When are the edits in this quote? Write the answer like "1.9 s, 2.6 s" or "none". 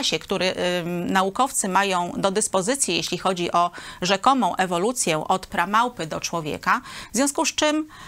none